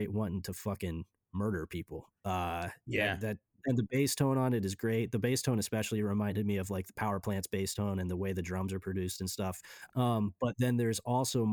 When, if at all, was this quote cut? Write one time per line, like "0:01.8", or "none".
0:09.9